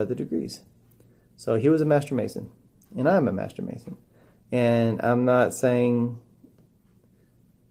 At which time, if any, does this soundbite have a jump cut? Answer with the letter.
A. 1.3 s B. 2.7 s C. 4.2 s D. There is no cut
D